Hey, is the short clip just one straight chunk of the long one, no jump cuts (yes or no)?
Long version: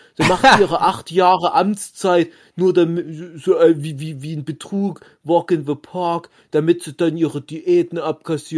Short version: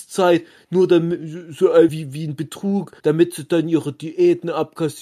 no